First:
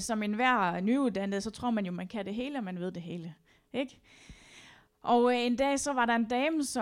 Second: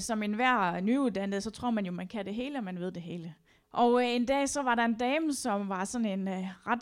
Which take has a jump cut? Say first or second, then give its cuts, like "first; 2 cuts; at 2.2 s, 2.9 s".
second; 1 cut; at 3.6 s